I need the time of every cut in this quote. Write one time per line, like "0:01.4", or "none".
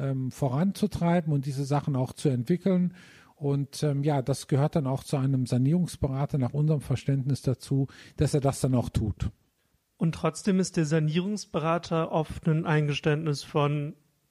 none